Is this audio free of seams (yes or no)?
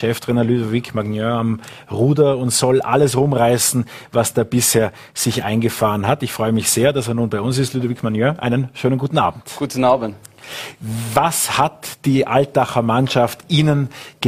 yes